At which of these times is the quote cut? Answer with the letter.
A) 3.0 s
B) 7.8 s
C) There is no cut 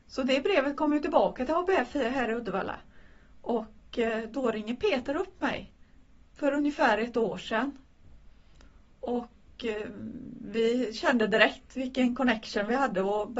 C